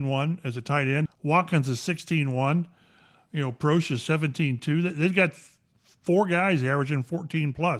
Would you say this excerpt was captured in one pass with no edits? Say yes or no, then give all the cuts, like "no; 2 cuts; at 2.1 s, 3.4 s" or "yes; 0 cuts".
no; 1 cut; at 1.1 s